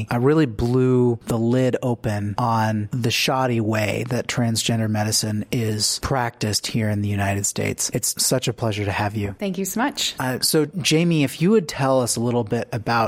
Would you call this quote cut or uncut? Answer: uncut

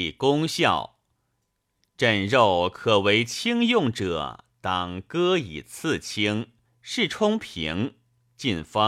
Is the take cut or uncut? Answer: cut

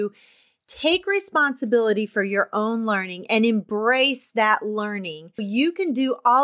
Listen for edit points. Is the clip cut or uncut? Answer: cut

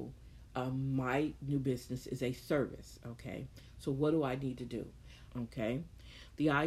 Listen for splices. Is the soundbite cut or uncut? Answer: cut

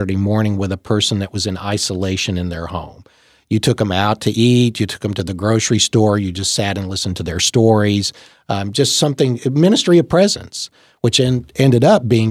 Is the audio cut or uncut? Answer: uncut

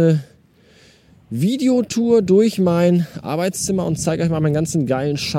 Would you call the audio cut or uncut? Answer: uncut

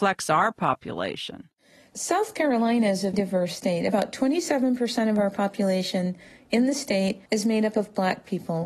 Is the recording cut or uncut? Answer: cut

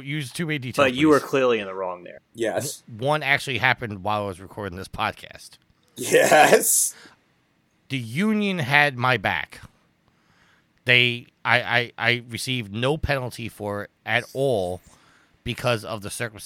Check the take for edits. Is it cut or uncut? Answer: cut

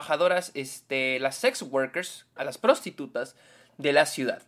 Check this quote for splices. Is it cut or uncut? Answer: cut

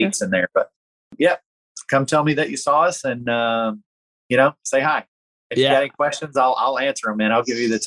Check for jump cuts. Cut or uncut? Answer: uncut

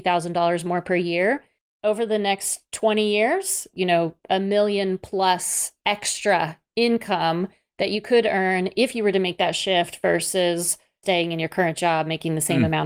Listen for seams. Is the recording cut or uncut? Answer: cut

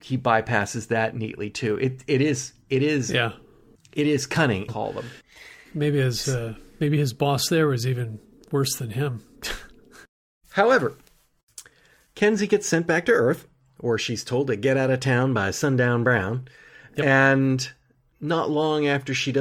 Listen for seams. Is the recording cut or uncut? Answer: cut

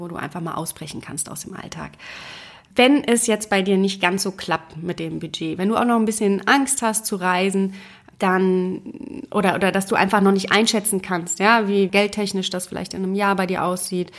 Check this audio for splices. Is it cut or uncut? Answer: uncut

